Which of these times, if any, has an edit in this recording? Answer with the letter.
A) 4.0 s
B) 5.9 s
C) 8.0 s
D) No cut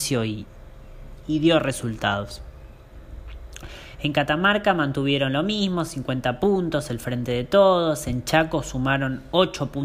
D